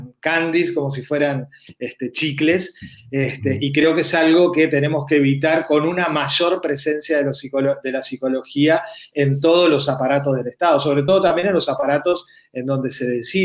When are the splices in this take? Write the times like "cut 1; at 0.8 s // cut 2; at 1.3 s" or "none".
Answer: none

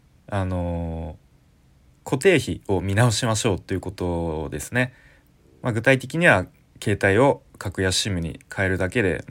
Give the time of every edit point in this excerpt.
none

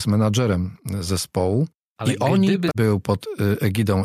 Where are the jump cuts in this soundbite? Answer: cut 1; at 2.7 s

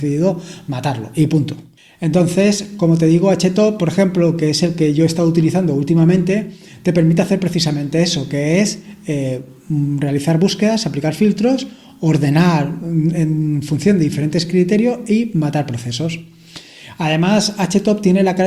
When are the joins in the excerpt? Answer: none

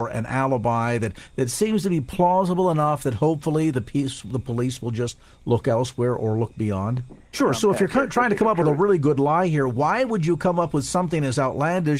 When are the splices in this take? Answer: cut 1; at 7.3 s

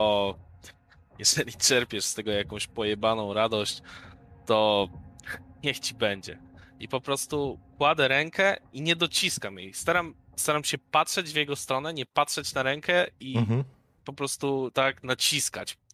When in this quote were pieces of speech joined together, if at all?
none

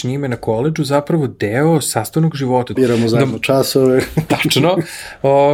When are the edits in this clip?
cut 1; at 2.8 s

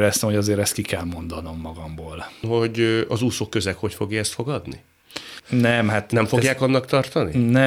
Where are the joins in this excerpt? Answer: cut 1; at 2.4 s // cut 2; at 5.4 s

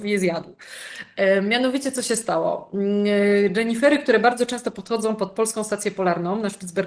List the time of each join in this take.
none

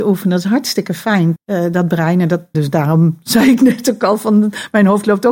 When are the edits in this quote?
cut 1; at 1.4 s // cut 2; at 2.5 s

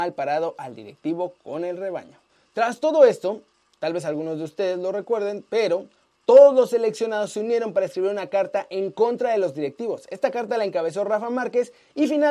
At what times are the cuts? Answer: none

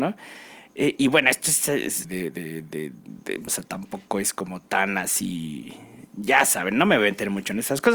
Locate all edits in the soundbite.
cut 1; at 2.0 s // cut 2; at 3.5 s

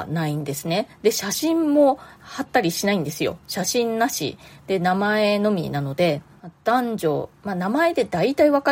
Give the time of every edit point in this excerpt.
none

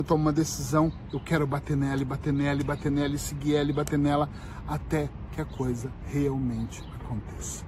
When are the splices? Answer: none

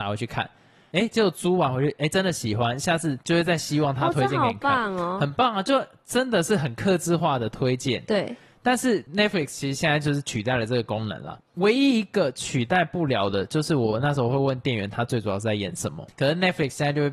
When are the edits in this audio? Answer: cut 1; at 11.5 s // cut 2; at 16.1 s

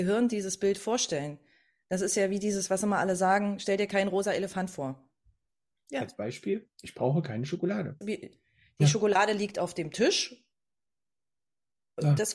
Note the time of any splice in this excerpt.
cut 1; at 5.8 s // cut 2; at 8.0 s

